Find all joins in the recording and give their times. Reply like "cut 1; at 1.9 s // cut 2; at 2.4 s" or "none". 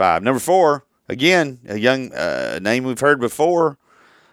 none